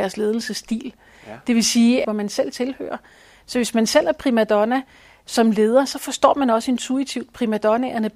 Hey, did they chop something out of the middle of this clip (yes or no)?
yes